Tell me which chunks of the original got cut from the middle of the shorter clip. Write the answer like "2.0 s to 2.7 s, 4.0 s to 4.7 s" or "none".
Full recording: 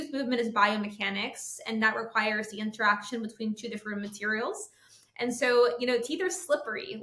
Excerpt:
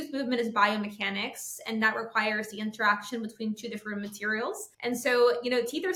4.7 s to 5.1 s